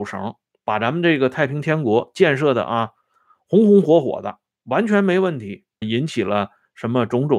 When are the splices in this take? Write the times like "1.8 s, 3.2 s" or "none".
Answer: 5.8 s